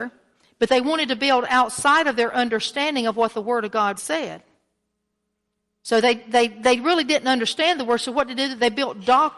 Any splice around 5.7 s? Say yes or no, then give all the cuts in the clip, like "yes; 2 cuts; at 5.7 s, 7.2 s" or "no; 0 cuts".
no; 1 cut; at 4.0 s